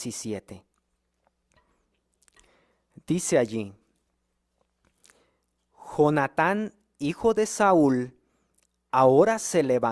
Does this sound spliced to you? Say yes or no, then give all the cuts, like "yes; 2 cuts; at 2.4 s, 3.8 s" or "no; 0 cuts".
no; 0 cuts